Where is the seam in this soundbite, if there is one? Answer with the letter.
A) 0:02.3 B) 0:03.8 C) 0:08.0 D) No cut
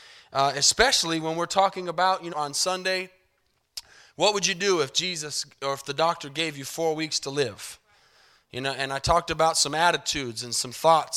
A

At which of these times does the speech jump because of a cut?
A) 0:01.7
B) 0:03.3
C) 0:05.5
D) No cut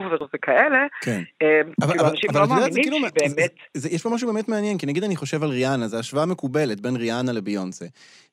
A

